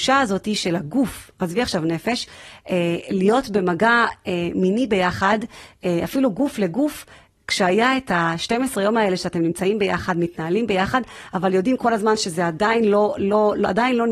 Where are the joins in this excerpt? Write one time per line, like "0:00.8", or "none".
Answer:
none